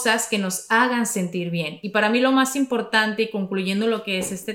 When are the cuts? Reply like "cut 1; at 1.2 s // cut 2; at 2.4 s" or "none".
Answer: none